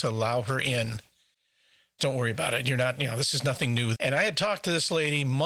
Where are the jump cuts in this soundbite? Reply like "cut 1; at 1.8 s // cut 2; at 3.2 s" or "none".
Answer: cut 1; at 2.0 s // cut 2; at 3.9 s

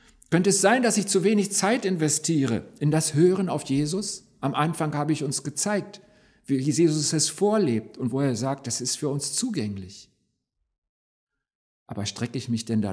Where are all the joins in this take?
none

